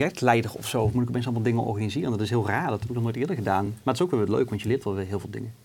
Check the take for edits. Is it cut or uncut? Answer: uncut